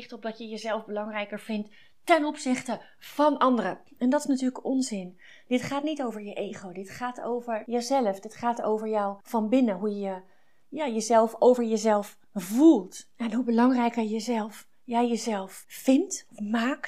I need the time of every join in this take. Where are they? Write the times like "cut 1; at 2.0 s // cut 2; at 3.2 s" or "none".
none